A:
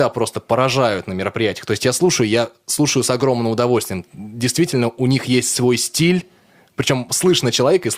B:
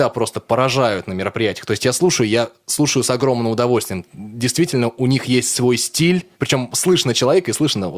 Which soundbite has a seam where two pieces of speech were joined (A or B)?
B